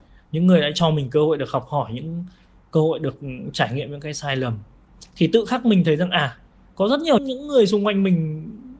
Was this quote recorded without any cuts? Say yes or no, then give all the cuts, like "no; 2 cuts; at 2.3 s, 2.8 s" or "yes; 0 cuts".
no; 1 cut; at 7.2 s